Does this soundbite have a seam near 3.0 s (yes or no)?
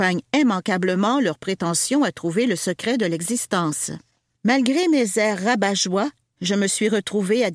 no